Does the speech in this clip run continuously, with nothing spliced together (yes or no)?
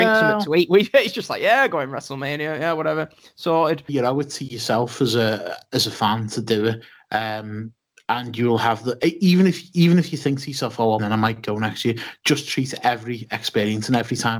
no